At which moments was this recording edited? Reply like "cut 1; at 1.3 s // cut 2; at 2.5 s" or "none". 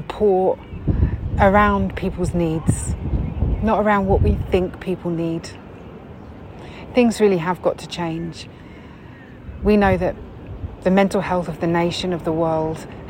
none